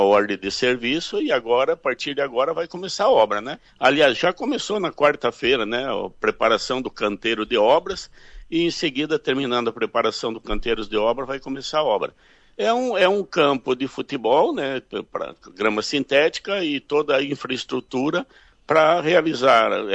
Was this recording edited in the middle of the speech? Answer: no; 0 cuts

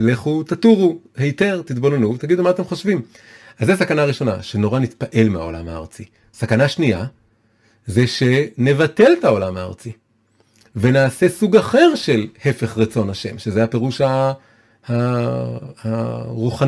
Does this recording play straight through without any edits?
yes; 0 cuts

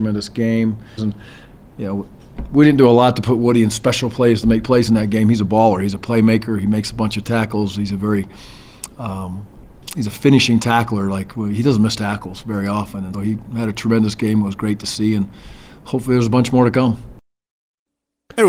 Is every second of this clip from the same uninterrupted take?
no; 2 cuts; at 1.0 s, 13.1 s

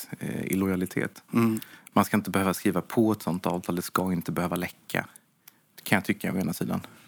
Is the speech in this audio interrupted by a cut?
no; 0 cuts

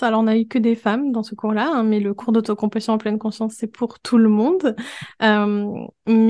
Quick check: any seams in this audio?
no; 0 cuts

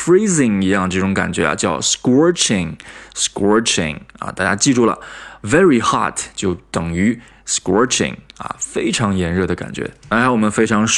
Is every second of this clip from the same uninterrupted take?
yes; 0 cuts

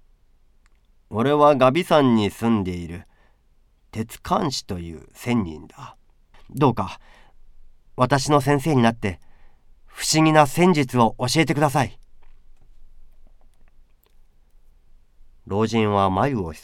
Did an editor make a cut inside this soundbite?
yes; 1 cut; at 6.3 s

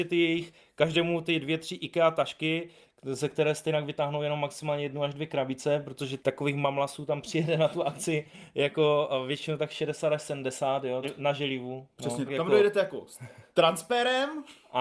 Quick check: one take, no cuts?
no; 3 cuts; at 6.2 s, 11.0 s, 12.3 s

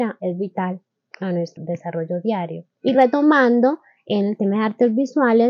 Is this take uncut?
no; 2 cuts; at 1.6 s, 2.7 s

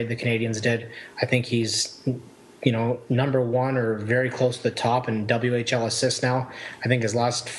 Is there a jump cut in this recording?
no; 0 cuts

